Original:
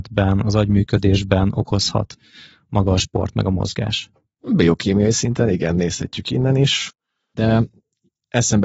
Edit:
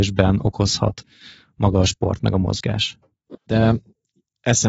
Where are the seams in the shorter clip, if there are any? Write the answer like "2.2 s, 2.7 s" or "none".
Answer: 3.3 s